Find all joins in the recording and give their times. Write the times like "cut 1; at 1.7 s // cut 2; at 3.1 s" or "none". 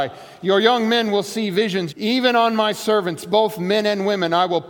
cut 1; at 1.9 s

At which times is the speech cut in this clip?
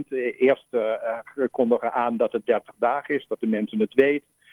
none

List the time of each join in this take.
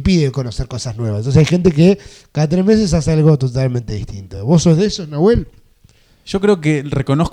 none

